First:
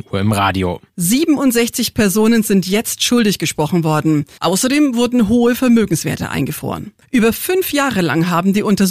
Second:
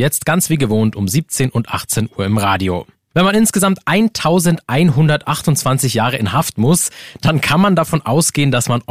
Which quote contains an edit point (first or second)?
first